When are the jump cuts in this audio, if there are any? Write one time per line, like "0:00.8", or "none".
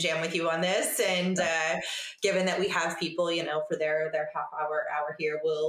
none